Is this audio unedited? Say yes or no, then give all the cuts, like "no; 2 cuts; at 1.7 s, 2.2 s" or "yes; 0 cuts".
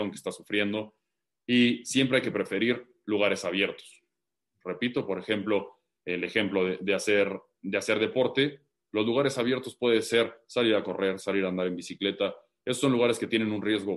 yes; 0 cuts